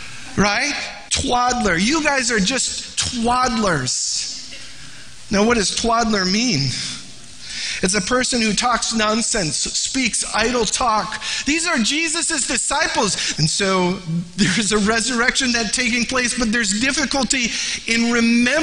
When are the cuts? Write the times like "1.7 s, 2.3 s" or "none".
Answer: 1.1 s, 13.4 s